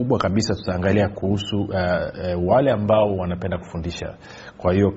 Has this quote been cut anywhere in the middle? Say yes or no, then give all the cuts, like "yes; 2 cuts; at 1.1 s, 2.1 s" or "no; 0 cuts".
no; 0 cuts